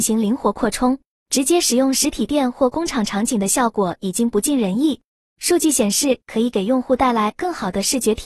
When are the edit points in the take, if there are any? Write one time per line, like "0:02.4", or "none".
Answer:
0:01.2
0:06.2